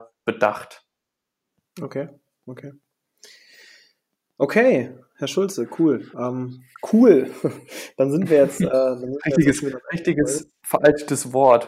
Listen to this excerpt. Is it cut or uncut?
uncut